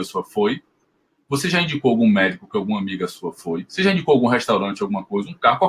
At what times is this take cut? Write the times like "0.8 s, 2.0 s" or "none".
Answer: none